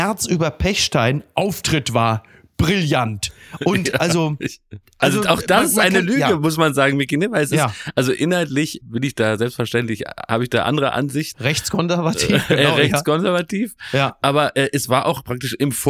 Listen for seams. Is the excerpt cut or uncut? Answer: cut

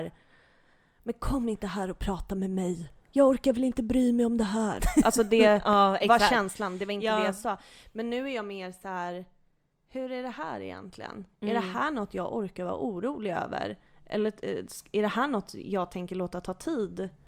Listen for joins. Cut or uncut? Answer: uncut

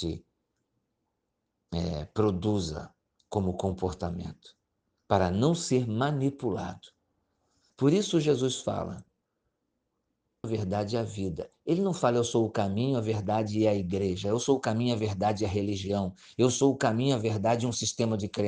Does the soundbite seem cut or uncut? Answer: cut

